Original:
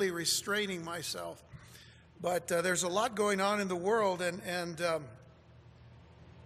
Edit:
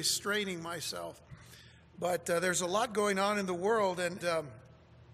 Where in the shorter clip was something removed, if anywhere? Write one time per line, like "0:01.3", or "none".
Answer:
0:04.2